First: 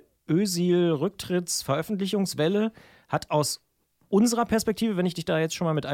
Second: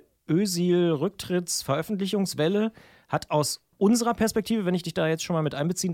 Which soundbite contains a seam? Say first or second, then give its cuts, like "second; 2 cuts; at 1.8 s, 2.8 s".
second; 1 cut; at 3.7 s